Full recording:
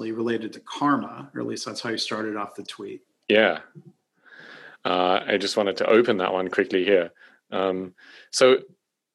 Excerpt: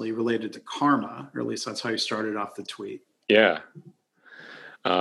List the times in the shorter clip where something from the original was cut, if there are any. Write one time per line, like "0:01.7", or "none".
none